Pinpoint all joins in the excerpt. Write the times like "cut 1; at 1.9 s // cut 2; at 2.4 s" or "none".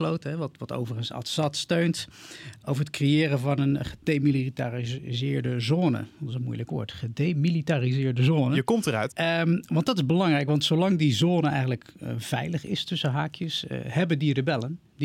cut 1; at 9.1 s